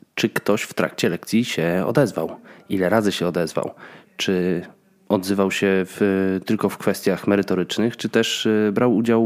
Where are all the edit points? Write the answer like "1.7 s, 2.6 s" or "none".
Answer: none